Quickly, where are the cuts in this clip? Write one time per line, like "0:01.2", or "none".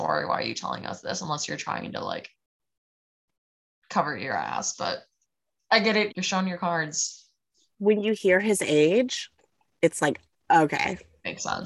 0:06.1